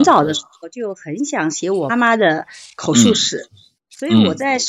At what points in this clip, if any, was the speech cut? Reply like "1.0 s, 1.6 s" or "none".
1.9 s